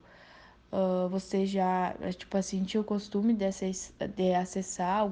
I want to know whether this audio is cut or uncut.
uncut